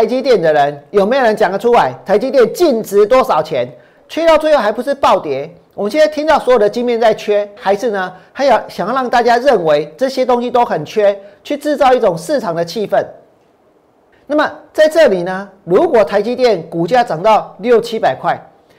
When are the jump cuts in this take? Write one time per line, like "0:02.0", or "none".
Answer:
0:04.0
0:07.6
0:14.1